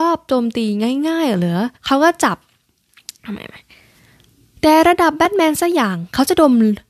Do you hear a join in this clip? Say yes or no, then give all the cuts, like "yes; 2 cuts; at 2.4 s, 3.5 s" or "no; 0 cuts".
yes; 1 cut; at 1.8 s